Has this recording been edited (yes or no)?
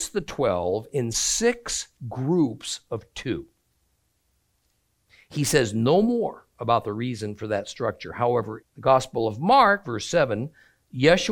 yes